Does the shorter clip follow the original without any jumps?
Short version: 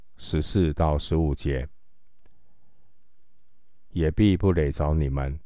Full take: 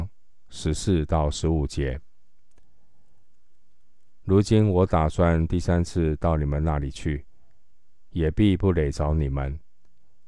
no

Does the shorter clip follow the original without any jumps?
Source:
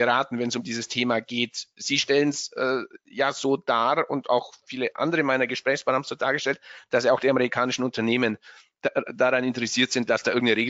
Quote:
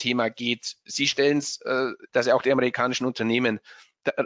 no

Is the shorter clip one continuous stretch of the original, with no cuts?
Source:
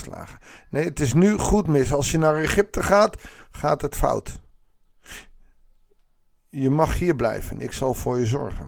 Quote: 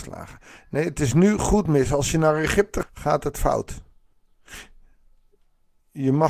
no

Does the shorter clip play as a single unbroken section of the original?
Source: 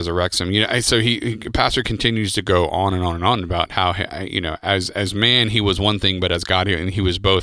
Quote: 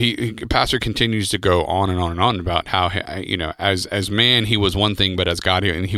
yes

